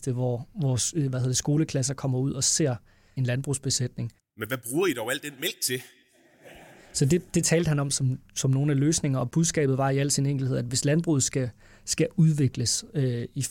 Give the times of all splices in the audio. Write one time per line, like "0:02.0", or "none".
0:04.2